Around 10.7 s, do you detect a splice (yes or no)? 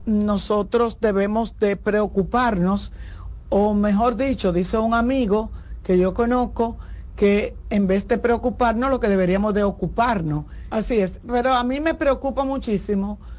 yes